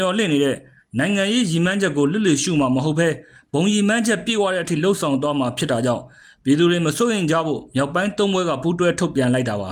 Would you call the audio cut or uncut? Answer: uncut